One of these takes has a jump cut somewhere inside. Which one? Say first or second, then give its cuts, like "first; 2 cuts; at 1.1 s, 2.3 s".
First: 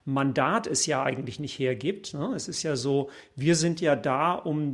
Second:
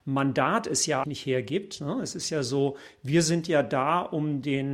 second; 1 cut; at 1.0 s